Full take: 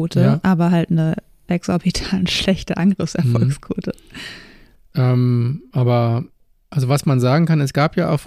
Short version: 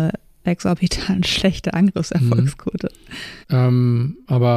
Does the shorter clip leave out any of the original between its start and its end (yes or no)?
yes